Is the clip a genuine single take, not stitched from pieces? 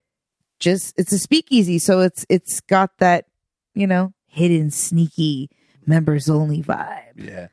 yes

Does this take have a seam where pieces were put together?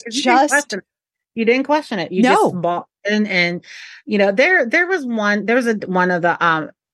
no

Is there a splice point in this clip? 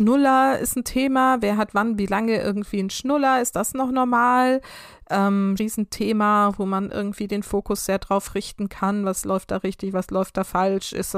yes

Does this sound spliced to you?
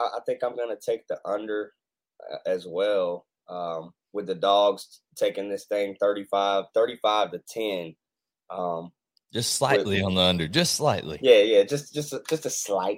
no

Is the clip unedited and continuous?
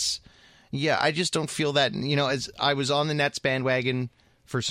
yes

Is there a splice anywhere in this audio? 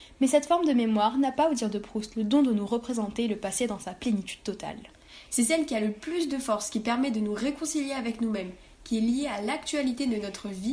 yes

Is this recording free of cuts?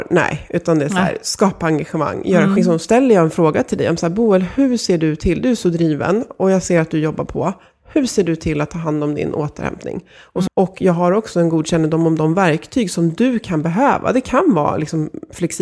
no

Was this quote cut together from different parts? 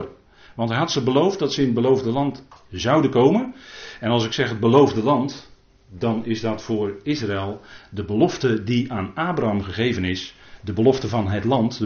no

